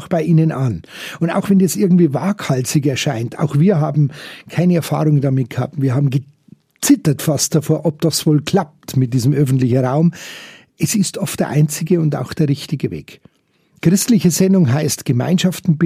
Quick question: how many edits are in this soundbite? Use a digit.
0